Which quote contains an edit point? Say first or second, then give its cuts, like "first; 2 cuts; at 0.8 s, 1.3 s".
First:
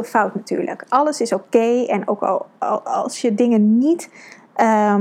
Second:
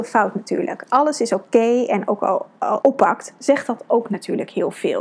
second; 1 cut; at 2.8 s